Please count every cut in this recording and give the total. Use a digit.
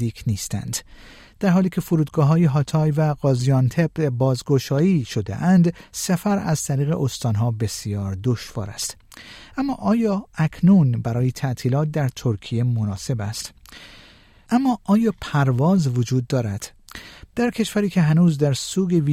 2